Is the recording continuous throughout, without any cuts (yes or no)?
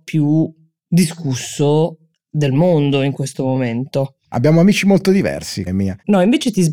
no